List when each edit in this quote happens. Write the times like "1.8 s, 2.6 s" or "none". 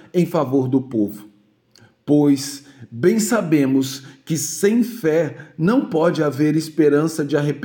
none